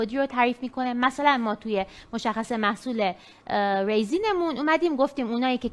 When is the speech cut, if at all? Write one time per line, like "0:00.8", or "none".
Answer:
none